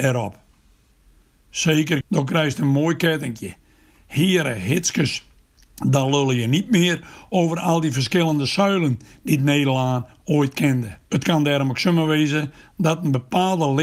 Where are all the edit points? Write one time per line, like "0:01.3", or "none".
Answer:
0:02.0
0:11.1